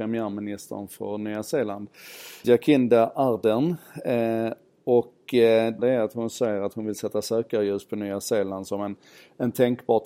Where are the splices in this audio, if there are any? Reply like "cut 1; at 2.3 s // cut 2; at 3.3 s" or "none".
cut 1; at 2.4 s // cut 2; at 5.8 s

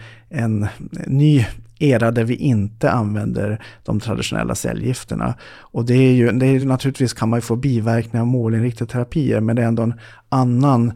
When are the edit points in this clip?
none

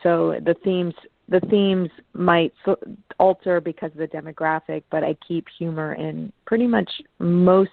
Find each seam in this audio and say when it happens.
none

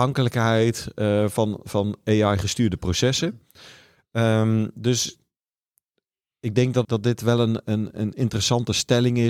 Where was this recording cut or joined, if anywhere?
cut 1; at 6.8 s

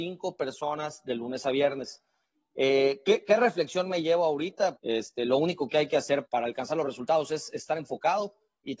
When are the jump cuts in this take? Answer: cut 1; at 4.8 s // cut 2; at 6.3 s

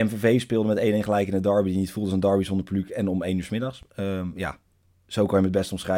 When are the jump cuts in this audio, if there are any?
none

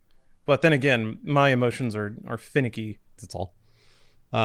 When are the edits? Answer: cut 1; at 3.2 s

